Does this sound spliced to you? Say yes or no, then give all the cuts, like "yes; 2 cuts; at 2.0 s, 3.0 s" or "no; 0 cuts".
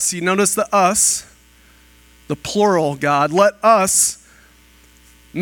no; 0 cuts